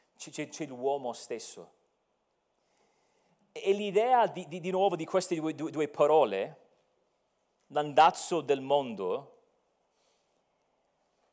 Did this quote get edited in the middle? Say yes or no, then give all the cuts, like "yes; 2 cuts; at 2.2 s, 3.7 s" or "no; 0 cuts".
no; 0 cuts